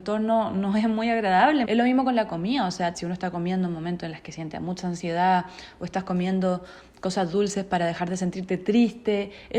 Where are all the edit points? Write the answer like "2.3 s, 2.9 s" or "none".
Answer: 1.6 s, 2.9 s